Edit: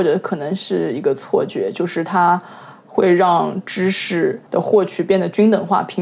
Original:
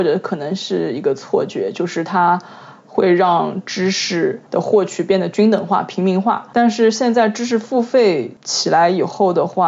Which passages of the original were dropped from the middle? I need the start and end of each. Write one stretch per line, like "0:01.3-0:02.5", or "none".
none